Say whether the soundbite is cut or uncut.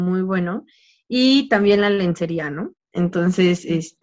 cut